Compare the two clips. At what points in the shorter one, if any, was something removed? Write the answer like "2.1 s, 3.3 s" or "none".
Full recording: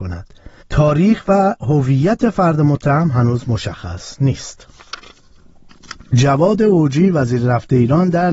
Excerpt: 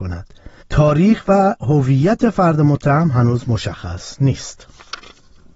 none